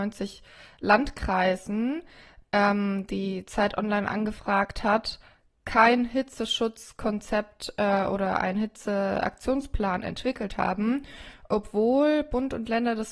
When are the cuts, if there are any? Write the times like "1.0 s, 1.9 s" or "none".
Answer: none